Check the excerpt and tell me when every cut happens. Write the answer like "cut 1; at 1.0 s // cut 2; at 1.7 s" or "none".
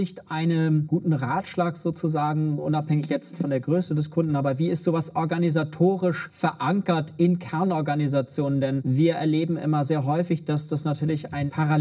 none

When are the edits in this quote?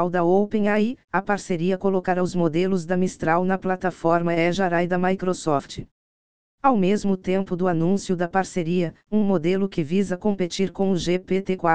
cut 1; at 9.0 s

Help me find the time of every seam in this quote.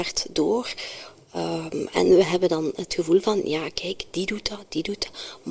none

